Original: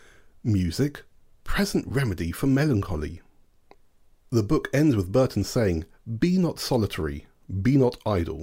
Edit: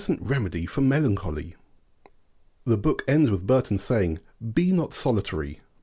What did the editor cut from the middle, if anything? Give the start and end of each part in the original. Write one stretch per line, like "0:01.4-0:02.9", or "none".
none